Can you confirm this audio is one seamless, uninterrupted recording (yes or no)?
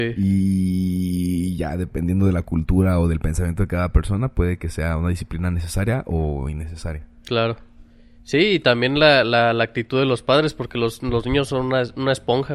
yes